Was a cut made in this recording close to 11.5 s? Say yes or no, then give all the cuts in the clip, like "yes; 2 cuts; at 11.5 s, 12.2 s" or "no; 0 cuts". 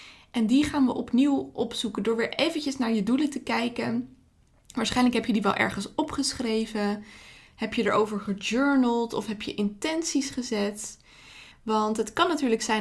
yes; 1 cut; at 11.5 s